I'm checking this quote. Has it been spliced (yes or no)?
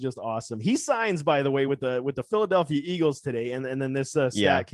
no